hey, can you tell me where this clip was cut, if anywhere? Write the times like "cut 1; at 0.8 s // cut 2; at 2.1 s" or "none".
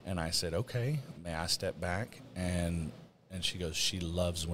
cut 1; at 1.1 s